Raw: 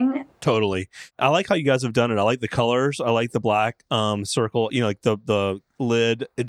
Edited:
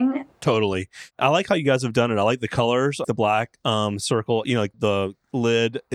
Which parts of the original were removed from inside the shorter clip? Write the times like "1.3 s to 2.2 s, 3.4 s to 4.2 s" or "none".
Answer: 3.0 s to 3.3 s, 5.0 s to 5.2 s